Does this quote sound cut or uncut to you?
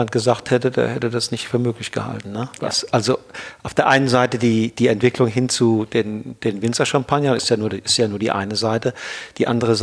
cut